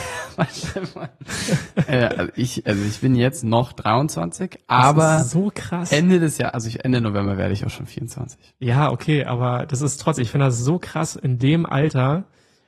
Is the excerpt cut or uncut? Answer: uncut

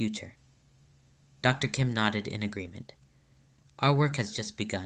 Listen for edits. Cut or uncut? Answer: uncut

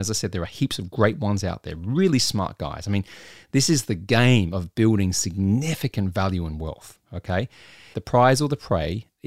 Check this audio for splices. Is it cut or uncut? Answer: cut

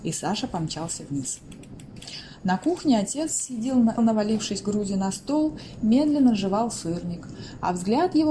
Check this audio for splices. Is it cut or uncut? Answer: cut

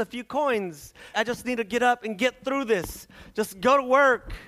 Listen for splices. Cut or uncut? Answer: cut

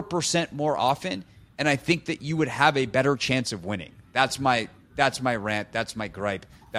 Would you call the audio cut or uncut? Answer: uncut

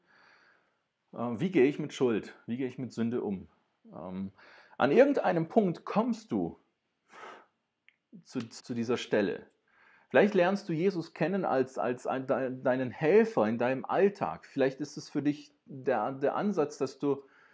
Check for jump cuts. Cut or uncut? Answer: cut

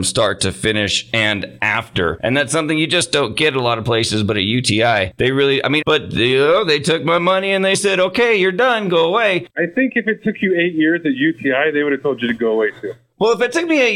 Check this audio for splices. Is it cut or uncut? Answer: cut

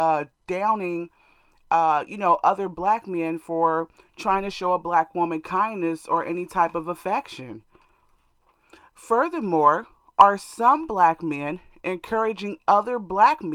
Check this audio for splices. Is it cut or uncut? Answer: uncut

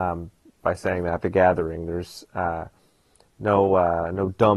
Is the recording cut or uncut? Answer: cut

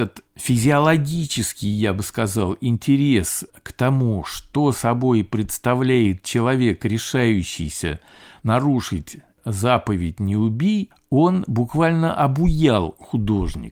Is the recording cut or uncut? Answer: uncut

